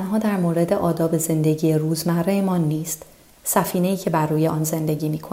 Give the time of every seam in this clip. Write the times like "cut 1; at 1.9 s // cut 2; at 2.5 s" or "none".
cut 1; at 3.4 s